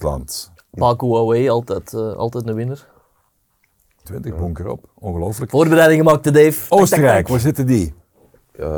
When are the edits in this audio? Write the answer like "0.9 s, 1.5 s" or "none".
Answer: 4.0 s